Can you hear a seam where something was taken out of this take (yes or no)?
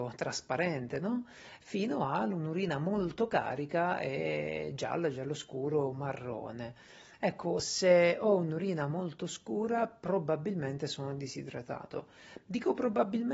no